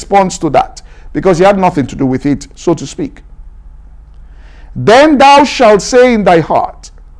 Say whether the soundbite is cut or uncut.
uncut